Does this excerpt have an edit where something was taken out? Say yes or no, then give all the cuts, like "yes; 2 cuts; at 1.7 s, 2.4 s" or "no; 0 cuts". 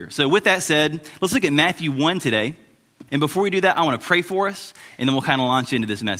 yes; 1 cut; at 3.1 s